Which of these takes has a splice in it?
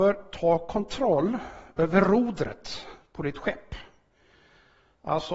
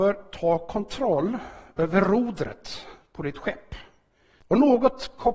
second; 1 cut; at 4.4 s

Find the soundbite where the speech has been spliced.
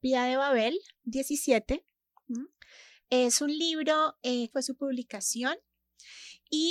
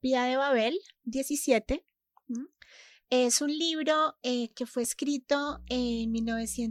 first; 1 cut; at 4.5 s

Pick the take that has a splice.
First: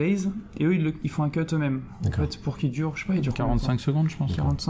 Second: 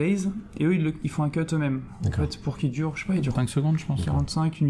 second; 1 cut; at 3.4 s

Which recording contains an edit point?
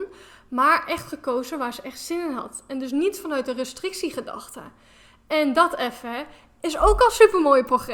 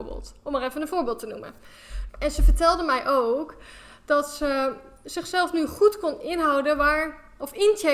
second; 1 cut; at 2.1 s

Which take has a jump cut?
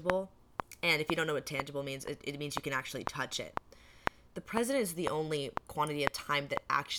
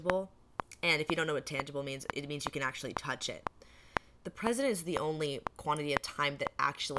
second; 1 cut; at 2.1 s

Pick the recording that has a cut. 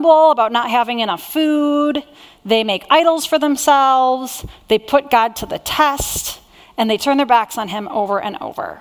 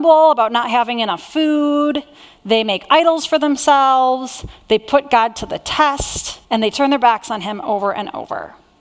second; 1 cut; at 6.4 s

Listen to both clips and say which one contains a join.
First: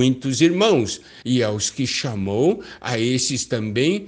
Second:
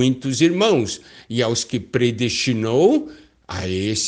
first; 1 cut; at 1.2 s

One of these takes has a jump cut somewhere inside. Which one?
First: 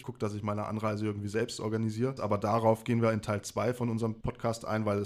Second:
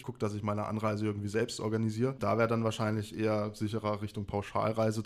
first; 1 cut; at 2.2 s

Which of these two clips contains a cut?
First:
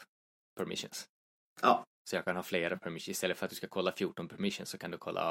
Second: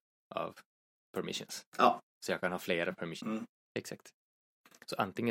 second; 2 cuts; at 1.7 s, 3.2 s

